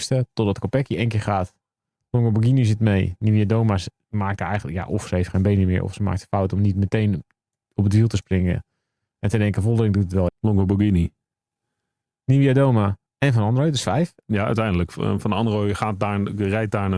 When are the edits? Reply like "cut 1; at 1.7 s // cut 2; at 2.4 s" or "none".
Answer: cut 1; at 10.3 s // cut 2; at 13.1 s